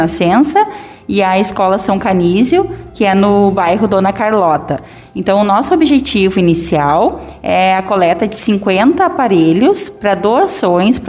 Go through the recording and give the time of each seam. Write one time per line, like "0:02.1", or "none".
none